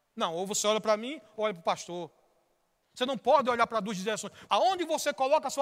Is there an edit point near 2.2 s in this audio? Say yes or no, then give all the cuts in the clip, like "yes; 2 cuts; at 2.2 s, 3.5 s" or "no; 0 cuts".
no; 1 cut; at 4.5 s